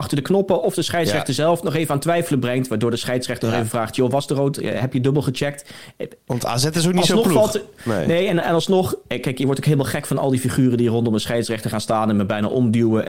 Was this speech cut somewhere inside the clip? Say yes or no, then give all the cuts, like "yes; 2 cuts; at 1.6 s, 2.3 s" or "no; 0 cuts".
no; 0 cuts